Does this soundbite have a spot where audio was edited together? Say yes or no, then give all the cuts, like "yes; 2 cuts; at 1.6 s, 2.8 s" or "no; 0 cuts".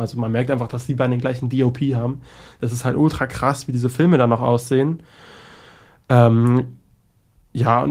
no; 0 cuts